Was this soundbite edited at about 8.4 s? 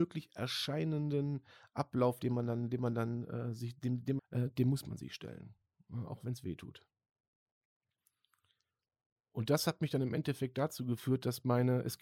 no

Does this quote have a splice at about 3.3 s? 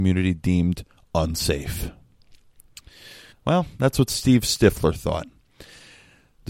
yes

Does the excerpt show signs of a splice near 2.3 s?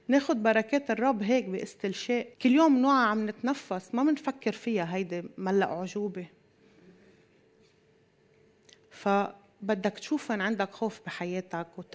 yes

